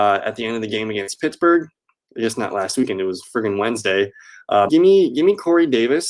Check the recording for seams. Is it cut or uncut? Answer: cut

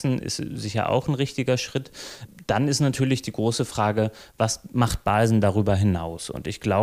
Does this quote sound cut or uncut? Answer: uncut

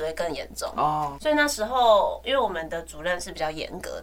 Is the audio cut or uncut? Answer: cut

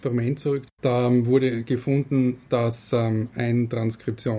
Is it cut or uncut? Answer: uncut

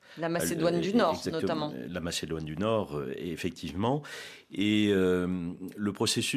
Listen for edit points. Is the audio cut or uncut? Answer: uncut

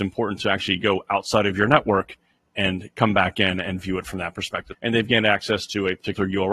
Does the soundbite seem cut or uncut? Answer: cut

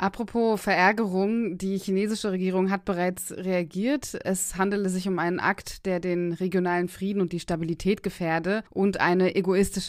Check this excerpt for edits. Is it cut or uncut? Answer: cut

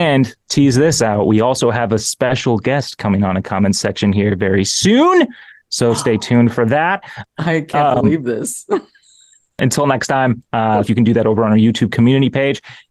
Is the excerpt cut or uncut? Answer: cut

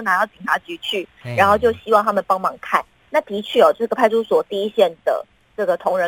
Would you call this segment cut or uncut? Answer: uncut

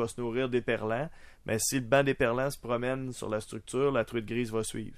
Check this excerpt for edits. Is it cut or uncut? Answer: uncut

